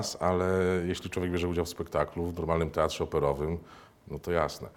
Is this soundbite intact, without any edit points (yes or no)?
yes